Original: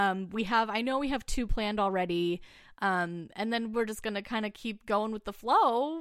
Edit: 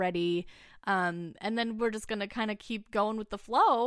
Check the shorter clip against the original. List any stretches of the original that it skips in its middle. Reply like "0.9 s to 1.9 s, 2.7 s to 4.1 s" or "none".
none